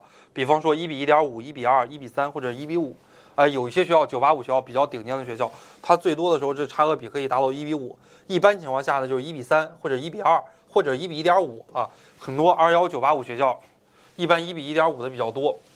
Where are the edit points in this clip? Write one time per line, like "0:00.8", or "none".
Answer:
none